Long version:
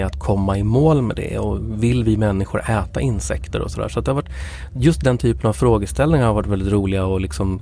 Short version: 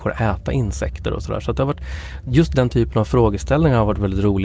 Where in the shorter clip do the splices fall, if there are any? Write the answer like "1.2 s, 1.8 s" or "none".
none